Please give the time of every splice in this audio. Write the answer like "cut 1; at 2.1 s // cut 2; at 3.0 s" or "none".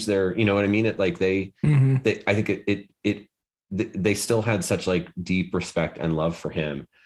none